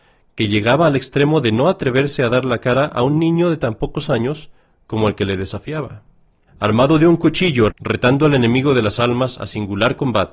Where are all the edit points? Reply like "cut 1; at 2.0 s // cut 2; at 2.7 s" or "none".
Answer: cut 1; at 6.5 s // cut 2; at 7.7 s